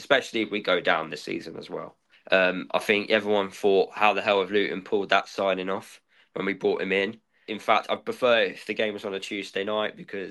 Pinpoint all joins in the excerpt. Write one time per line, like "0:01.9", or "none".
0:02.1
0:07.5